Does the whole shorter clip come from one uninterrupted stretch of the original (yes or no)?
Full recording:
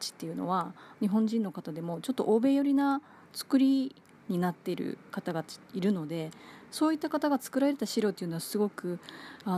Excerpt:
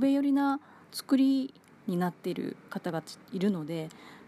yes